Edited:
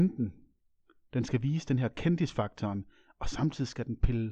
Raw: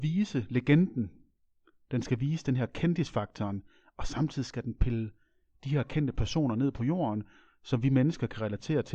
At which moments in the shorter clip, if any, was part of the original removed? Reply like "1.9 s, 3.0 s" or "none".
none

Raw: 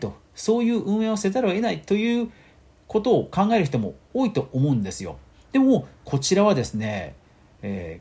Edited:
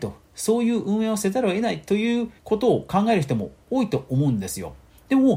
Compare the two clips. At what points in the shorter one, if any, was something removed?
2.4 s

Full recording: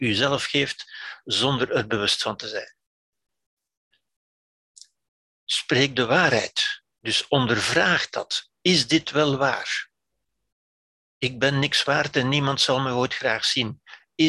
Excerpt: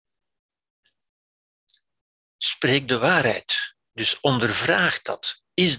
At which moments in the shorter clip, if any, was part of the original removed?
none

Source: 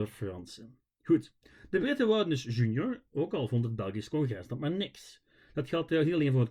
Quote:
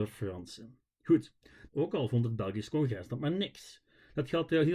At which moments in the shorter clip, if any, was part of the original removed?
1.7 s

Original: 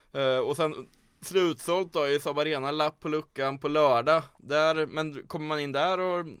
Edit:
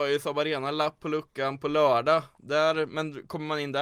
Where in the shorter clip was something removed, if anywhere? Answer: none

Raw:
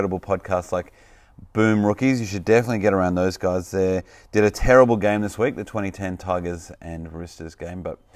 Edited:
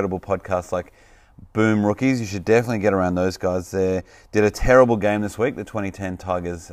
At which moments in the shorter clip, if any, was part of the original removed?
none

